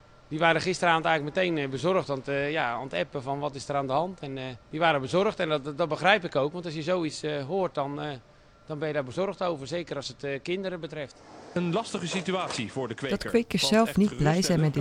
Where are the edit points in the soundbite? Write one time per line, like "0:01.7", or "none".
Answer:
none

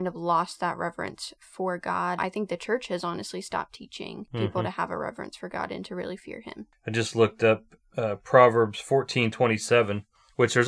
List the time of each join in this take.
0:02.2

